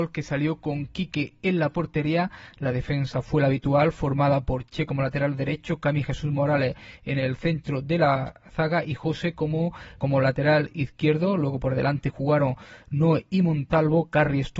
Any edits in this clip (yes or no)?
yes